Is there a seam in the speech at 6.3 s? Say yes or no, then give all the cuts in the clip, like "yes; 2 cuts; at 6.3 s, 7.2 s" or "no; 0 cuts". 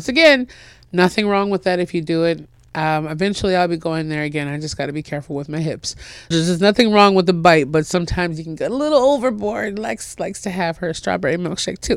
yes; 1 cut; at 6.3 s